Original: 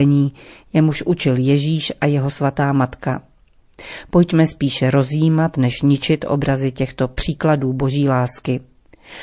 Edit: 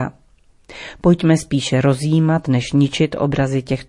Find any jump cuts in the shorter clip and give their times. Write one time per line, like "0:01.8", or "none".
none